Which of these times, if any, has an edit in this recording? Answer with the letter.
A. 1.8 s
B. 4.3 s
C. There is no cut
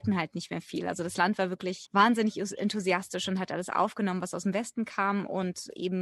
A